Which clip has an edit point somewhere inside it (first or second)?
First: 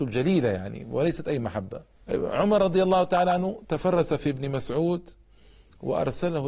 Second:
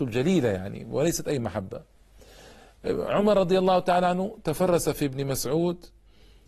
first